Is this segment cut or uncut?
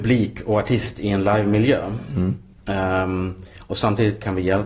uncut